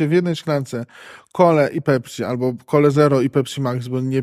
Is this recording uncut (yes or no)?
yes